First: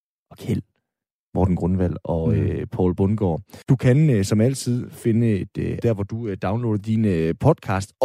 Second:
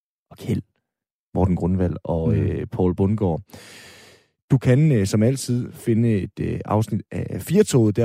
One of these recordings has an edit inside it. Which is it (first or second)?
first